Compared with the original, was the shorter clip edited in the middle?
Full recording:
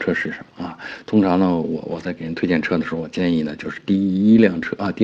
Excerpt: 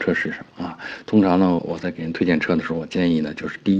yes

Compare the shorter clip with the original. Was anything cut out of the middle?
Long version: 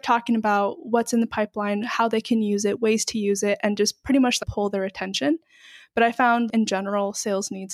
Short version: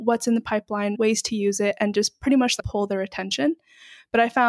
yes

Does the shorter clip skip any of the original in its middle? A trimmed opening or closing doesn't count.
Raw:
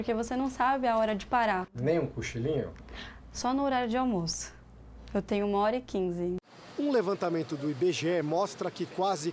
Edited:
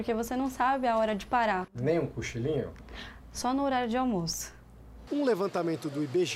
yes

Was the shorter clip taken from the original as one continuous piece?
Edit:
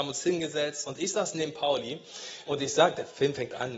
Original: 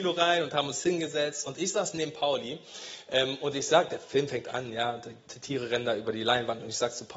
no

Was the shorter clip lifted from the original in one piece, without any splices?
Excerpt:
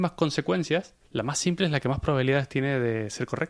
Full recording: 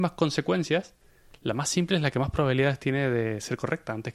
no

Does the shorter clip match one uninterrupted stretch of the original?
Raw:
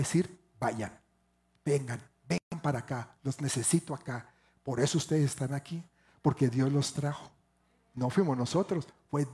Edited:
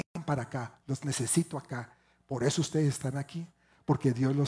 yes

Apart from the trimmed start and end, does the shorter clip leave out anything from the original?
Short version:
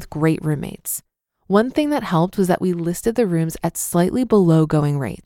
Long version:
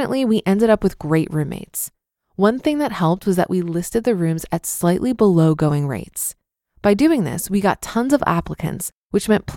no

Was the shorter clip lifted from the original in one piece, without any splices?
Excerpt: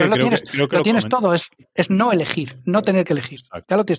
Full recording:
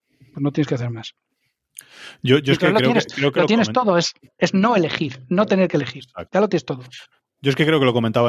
yes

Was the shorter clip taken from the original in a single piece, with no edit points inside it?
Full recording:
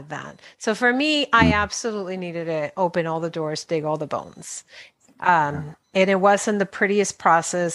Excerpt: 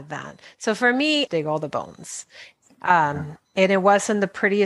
no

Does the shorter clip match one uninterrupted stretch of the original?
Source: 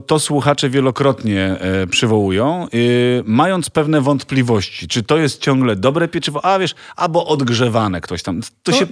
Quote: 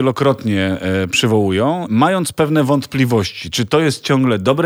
no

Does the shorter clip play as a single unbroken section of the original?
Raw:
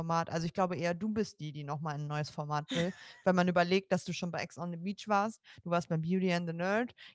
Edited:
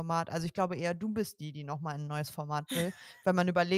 yes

